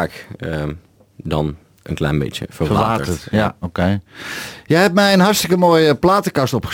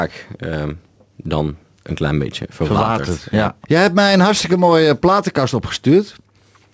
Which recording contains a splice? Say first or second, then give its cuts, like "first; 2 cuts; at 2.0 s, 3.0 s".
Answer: second; 1 cut; at 3.6 s